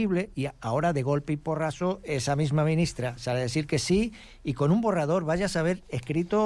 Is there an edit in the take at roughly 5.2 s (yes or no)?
no